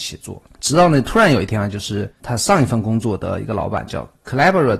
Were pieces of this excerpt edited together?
no; 0 cuts

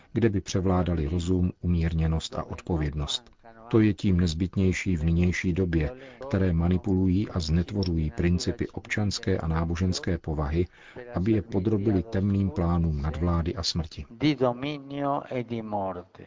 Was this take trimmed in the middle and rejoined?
yes; 1 cut; at 6.2 s

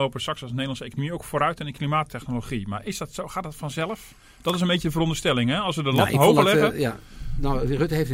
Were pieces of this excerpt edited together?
no; 0 cuts

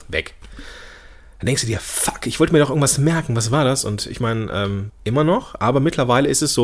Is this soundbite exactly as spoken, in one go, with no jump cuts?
no; 1 cut; at 4.9 s

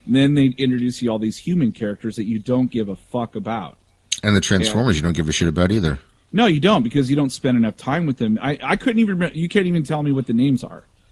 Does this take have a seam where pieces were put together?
no; 0 cuts

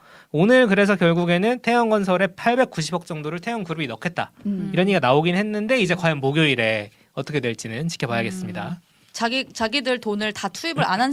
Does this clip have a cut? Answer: no; 0 cuts

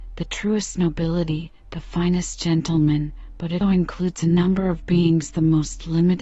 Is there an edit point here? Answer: yes; 1 cut; at 3.6 s

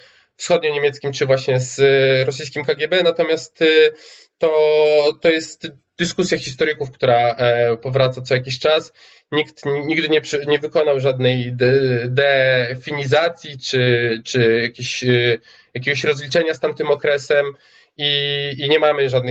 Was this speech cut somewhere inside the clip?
no; 0 cuts

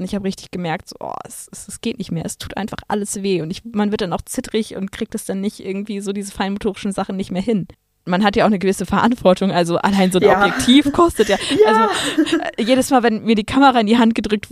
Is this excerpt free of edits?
yes; 0 cuts

